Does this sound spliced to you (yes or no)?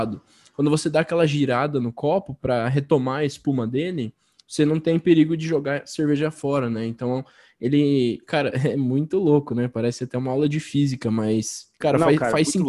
no